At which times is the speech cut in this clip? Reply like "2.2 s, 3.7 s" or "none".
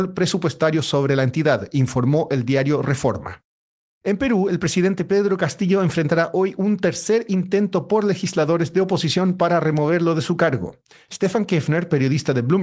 none